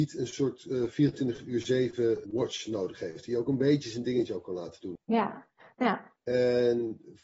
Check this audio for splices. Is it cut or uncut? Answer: cut